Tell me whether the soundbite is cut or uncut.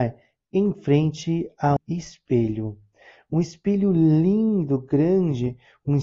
cut